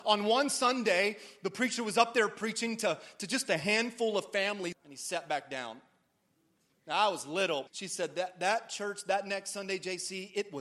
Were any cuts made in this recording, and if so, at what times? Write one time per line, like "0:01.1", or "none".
0:04.7
0:07.7